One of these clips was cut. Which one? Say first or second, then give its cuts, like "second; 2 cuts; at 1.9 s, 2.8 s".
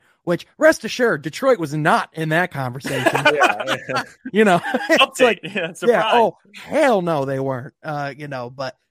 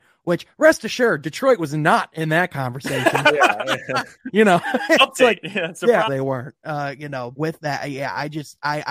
second; 2 cuts; at 6.1 s, 7.3 s